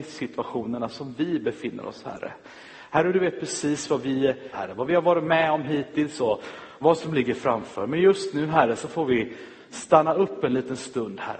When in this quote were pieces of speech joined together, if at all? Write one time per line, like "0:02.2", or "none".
0:04.5